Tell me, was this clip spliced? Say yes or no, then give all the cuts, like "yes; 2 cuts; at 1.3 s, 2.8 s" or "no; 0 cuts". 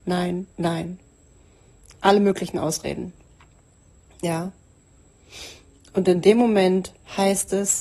no; 0 cuts